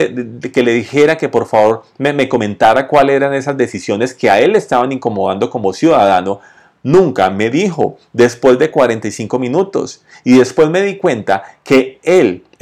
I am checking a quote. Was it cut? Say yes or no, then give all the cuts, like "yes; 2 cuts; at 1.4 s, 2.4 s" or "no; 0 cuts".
no; 0 cuts